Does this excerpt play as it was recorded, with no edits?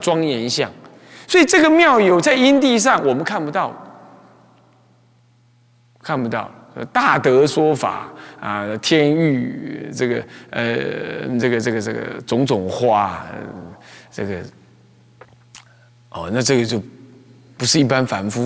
yes; 0 cuts

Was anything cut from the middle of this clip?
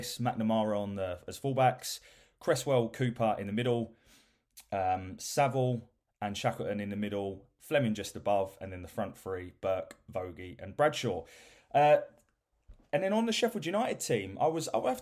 no; 0 cuts

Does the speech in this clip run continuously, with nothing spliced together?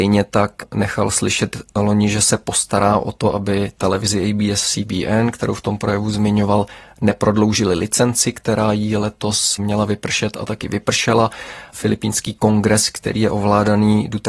yes; 0 cuts

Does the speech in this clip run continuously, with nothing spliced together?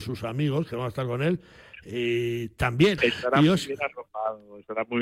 no; 1 cut; at 3.0 s

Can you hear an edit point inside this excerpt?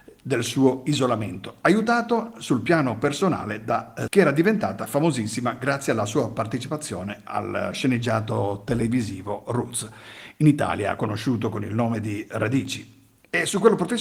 yes; 1 cut; at 4.1 s

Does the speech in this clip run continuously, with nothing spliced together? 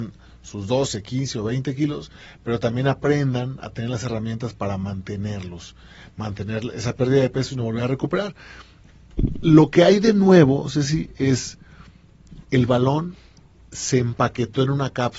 no; 1 cut; at 12.4 s

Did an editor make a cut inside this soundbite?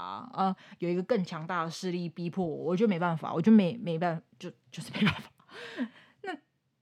no; 0 cuts

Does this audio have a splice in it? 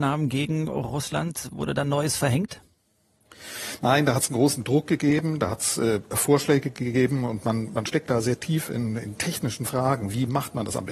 no; 0 cuts

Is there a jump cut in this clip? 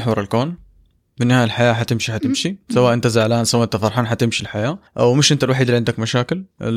yes; 1 cut; at 4.9 s

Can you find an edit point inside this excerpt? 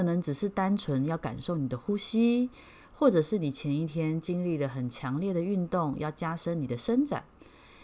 no; 0 cuts

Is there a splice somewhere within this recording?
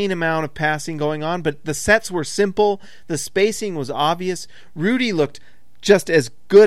no; 0 cuts

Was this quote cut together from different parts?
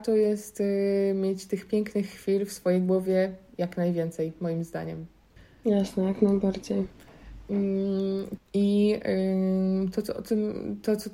yes; 1 cut; at 8.4 s

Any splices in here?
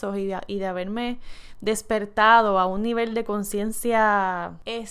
no; 0 cuts

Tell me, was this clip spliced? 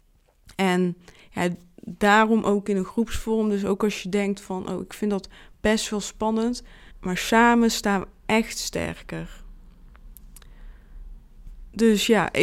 yes; 1 cut; at 6.9 s

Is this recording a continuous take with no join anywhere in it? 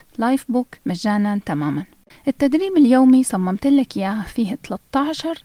yes; 0 cuts

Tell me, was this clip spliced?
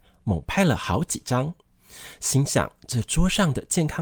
no; 0 cuts

